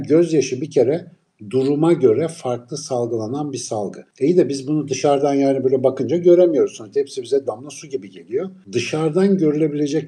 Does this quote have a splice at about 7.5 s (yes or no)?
yes